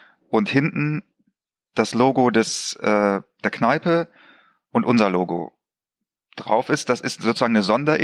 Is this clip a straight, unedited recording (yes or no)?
yes